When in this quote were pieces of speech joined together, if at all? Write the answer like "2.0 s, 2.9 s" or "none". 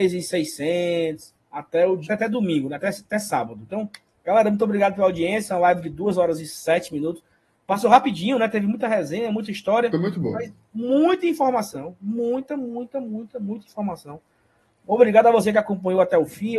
2.1 s